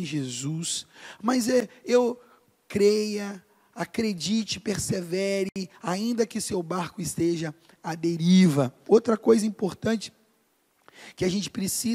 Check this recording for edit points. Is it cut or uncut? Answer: cut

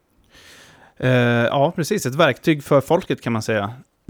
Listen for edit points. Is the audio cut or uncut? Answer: uncut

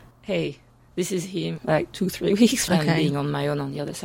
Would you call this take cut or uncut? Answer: cut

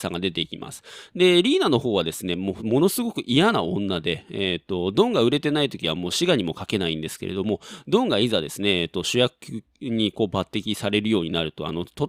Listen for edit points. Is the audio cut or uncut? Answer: cut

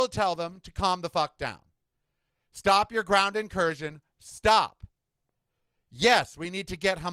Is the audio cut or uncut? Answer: cut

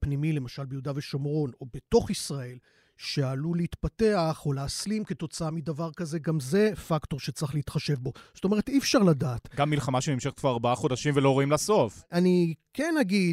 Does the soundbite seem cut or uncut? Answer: uncut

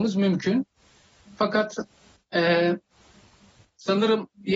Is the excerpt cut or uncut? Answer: cut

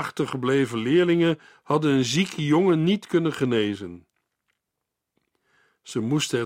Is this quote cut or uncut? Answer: uncut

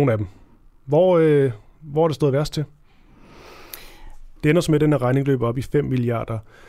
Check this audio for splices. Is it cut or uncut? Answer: cut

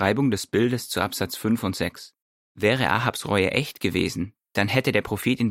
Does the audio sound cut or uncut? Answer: cut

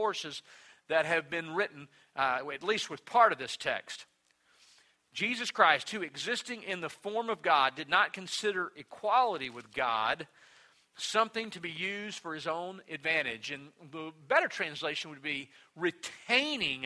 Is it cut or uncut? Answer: uncut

